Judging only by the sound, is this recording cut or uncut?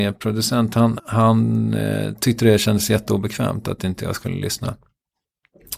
cut